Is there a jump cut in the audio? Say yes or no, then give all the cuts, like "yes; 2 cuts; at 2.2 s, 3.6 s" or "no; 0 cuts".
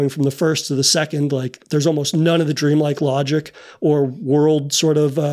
no; 0 cuts